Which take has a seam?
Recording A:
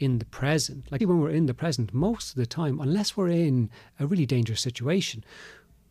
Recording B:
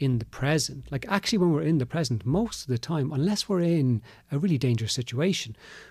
A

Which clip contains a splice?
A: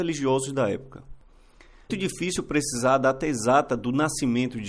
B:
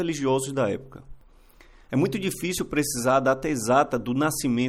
A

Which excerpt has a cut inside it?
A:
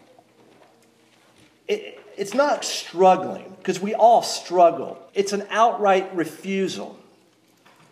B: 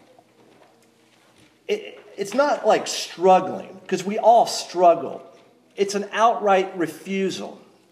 A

